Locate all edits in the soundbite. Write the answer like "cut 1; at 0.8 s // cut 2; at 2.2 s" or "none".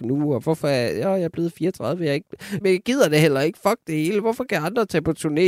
cut 1; at 2.6 s

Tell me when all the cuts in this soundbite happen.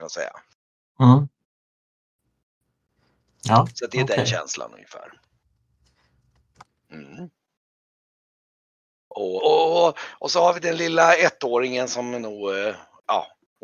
cut 1; at 9.4 s

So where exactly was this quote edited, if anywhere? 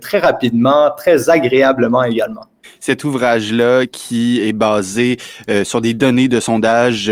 cut 1; at 2.6 s

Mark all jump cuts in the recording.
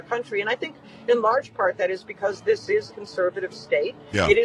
cut 1; at 2.9 s

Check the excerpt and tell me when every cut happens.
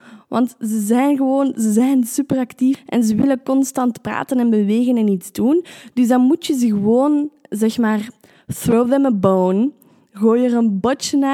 none

